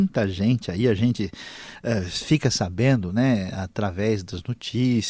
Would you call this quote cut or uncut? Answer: uncut